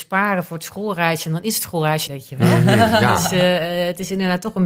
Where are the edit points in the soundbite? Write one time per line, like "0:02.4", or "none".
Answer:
0:02.1